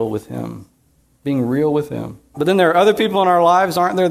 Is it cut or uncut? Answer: cut